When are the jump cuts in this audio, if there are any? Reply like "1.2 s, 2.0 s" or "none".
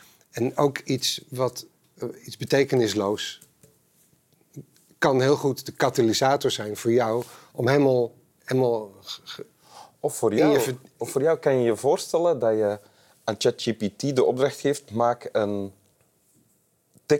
none